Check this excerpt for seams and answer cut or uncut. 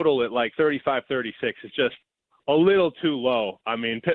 uncut